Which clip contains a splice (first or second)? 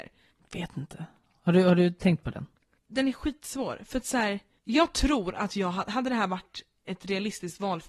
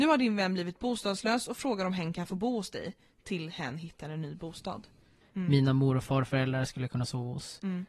second